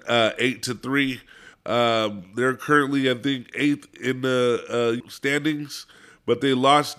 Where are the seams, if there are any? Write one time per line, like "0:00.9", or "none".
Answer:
0:01.5
0:05.0